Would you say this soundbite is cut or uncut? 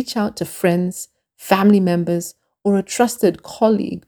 uncut